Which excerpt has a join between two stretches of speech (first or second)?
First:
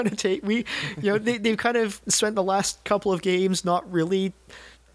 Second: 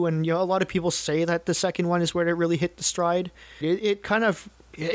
second